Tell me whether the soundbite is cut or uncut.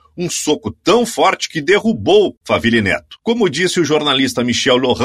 uncut